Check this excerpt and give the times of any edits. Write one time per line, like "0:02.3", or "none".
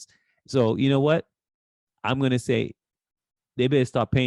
none